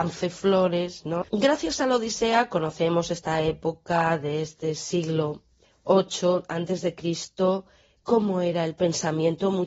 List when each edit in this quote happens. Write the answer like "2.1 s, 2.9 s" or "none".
1.2 s